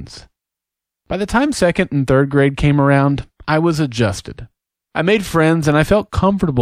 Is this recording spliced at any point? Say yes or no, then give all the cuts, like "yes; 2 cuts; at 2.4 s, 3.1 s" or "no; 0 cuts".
no; 0 cuts